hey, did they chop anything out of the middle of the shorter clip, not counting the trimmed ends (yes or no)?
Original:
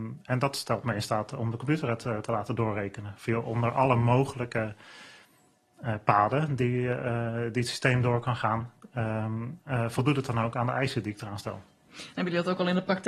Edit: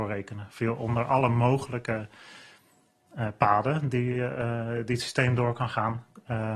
no